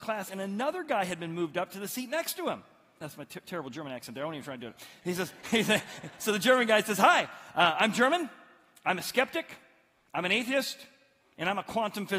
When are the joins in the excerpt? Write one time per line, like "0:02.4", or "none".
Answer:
0:03.0